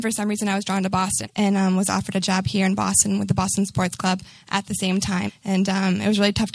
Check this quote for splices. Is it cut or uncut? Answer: cut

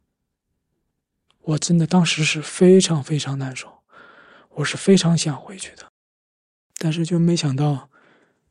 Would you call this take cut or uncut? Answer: uncut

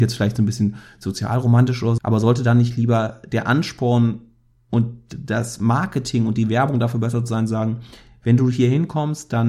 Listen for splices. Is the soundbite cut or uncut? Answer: cut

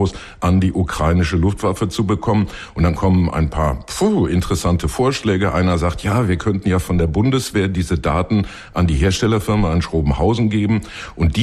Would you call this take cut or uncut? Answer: uncut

